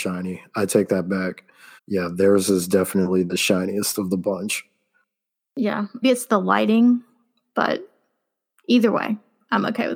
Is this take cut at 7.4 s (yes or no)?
no